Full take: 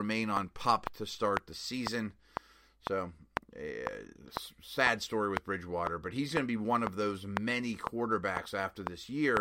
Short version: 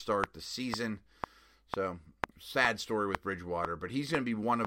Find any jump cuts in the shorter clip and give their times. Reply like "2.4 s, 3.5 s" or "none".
2.3 s

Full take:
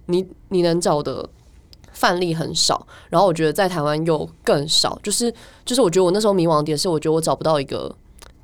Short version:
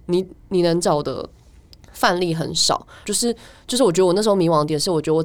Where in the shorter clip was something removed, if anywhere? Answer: 3.0 s

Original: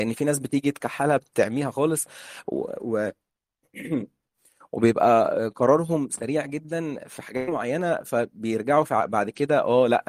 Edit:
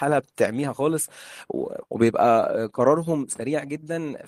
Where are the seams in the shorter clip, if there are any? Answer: 1.8 s

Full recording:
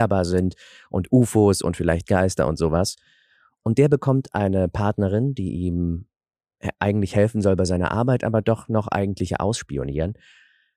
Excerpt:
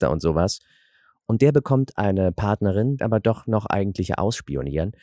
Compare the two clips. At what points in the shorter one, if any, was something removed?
3.0 s

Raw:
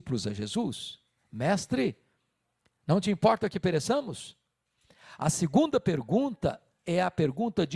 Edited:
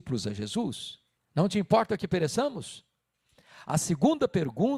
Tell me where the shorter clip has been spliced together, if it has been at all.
1.2 s

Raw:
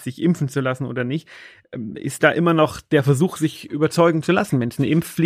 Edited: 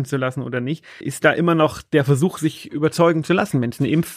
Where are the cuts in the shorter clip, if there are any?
1.0 s

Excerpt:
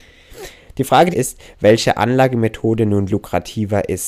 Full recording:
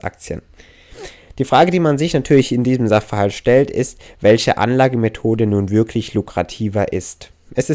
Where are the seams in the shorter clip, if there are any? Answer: 1.1 s, 3.1 s

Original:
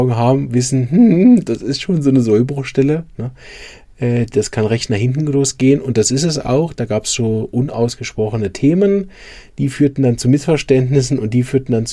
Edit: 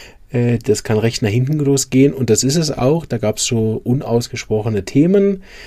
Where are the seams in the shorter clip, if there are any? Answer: none

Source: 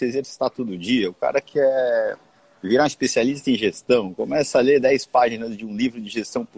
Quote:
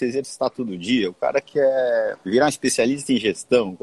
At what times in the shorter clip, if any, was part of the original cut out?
2.2 s

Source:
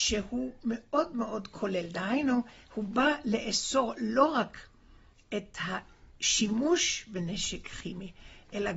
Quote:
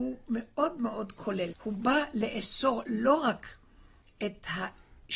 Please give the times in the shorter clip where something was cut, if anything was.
1.5 s

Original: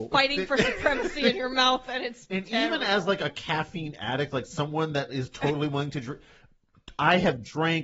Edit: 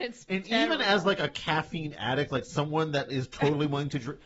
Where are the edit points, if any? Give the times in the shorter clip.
none

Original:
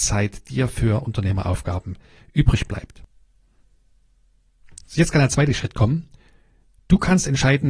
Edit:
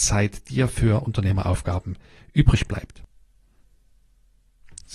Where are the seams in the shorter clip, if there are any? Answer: none

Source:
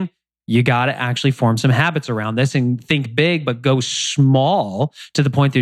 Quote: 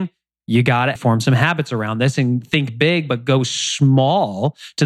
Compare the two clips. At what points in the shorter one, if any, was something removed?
1.0 s

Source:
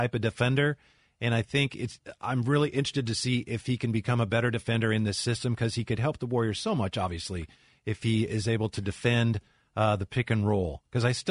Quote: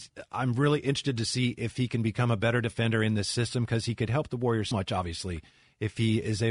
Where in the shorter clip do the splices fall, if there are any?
4.7 s

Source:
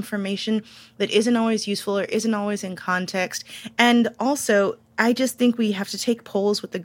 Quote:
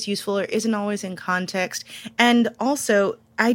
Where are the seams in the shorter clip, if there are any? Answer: none

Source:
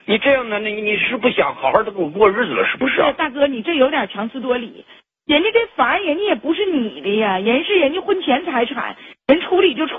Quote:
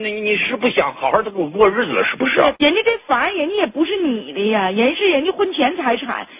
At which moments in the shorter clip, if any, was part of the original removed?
2.6 s

